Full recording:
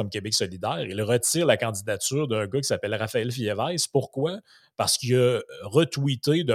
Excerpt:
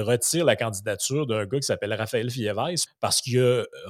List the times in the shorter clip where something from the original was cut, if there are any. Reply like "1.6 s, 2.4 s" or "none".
2.9 s